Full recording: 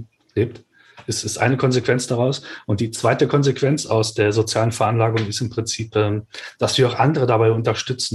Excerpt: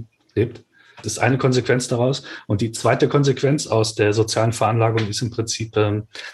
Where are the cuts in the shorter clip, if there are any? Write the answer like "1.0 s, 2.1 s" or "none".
1.0 s